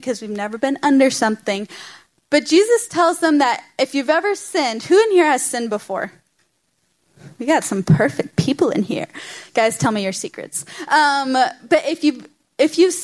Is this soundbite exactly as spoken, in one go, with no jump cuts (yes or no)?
yes